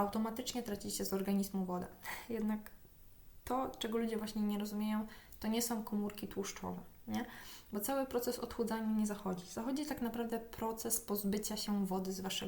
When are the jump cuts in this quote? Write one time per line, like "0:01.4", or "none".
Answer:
none